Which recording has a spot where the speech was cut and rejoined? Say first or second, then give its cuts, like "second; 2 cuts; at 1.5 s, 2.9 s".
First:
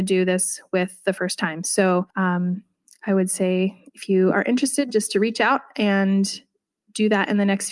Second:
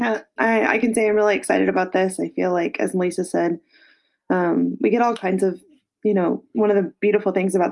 first; 1 cut; at 2.1 s